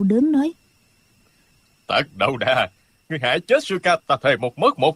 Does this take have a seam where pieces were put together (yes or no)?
yes